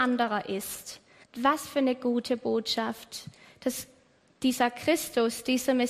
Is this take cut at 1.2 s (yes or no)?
yes